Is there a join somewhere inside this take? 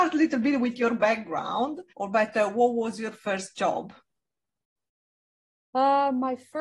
yes; 1 cut; at 1.9 s

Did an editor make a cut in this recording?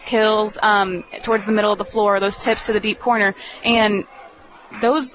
no; 0 cuts

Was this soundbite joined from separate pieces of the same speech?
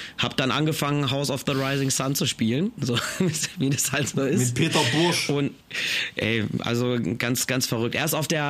no; 0 cuts

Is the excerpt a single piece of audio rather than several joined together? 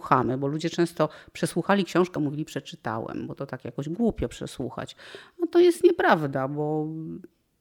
yes; 0 cuts

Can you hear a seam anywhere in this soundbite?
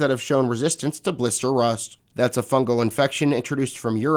no; 0 cuts

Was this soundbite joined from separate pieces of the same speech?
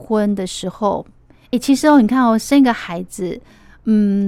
no; 0 cuts

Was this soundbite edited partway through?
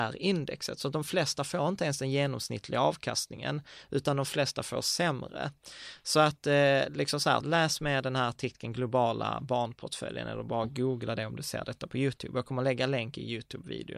yes; 1 cut; at 7.4 s

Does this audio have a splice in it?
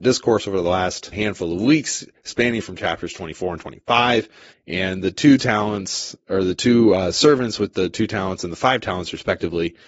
yes; 2 cuts; at 1.1 s, 4.5 s

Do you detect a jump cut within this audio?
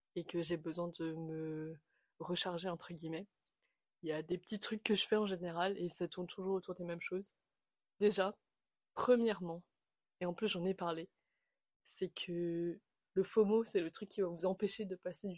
no; 0 cuts

